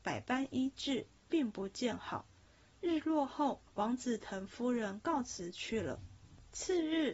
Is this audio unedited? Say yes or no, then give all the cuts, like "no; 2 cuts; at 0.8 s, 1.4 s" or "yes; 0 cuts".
yes; 0 cuts